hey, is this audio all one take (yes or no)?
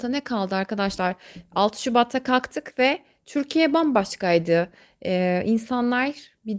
yes